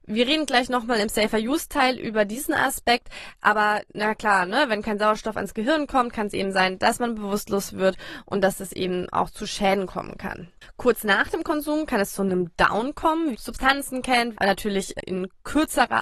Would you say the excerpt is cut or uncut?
cut